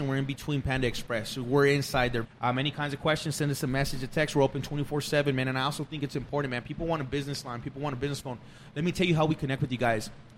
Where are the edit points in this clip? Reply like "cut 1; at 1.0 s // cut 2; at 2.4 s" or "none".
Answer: cut 1; at 2.2 s